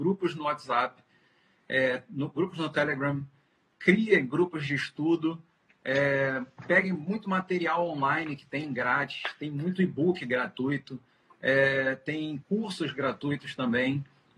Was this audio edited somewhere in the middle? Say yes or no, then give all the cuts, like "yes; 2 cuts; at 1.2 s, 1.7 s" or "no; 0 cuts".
no; 0 cuts